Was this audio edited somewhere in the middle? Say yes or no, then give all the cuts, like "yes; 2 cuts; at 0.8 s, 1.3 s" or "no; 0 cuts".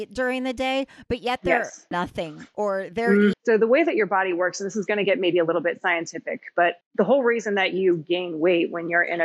yes; 3 cuts; at 1.9 s, 3.3 s, 6.8 s